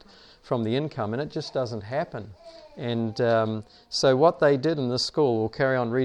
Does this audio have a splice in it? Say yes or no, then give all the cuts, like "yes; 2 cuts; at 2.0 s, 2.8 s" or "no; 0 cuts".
no; 0 cuts